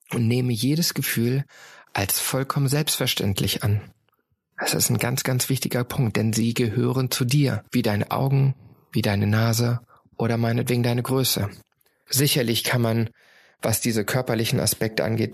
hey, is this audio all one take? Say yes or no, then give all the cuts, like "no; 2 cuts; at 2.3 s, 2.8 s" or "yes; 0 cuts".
yes; 0 cuts